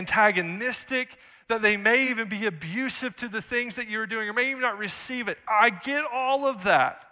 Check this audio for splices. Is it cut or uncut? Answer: uncut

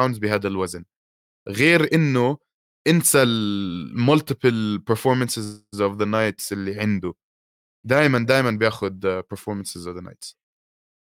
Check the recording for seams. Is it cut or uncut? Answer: uncut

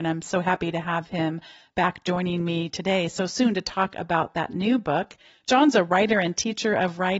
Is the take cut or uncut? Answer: uncut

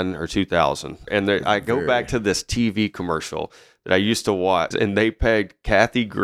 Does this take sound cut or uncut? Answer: cut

